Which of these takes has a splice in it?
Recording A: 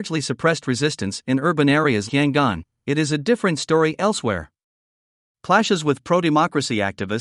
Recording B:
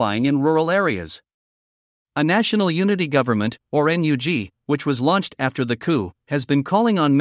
A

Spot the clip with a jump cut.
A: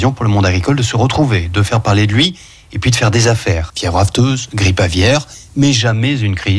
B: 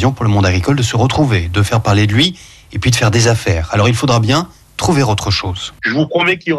A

